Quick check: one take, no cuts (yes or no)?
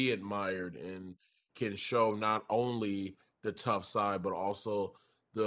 no